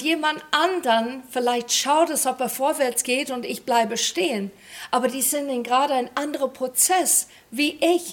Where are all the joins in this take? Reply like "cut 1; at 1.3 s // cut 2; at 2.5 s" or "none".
none

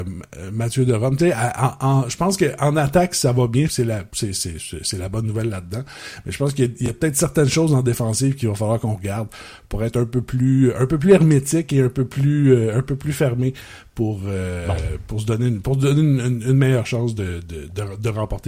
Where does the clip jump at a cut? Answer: cut 1; at 3.7 s

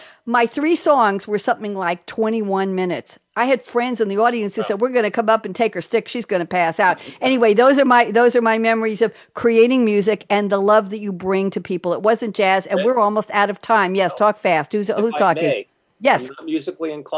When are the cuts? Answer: none

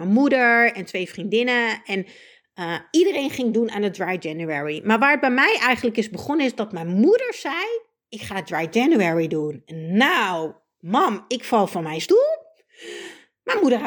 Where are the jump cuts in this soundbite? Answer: none

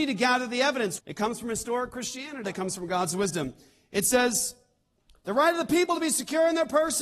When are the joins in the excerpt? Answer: cut 1; at 1.0 s // cut 2; at 2.4 s

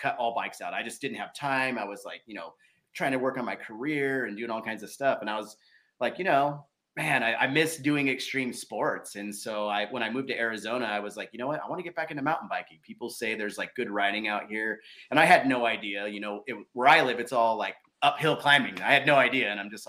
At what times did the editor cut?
none

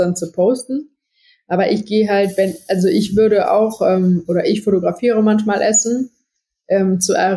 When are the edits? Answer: none

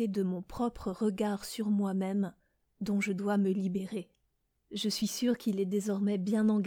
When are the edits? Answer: cut 1; at 4.6 s

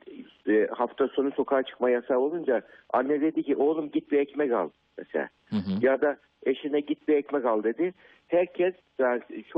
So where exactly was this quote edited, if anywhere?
none

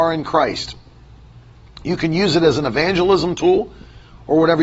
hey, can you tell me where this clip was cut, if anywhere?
none

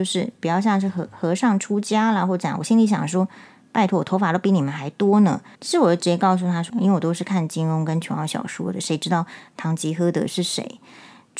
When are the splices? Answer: cut 1; at 5.5 s // cut 2; at 6.7 s

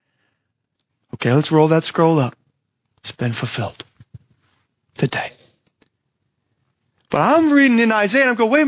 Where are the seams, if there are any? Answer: none

